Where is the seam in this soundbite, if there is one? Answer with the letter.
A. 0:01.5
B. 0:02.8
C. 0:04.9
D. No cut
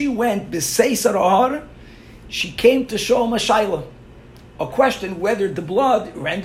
D